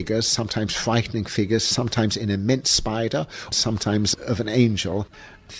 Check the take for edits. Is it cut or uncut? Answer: cut